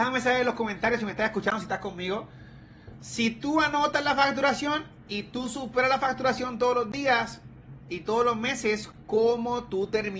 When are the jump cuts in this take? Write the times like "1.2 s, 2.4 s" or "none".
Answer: 3.0 s